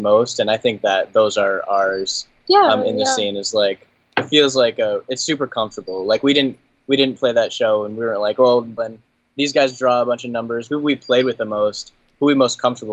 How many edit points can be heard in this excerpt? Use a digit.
2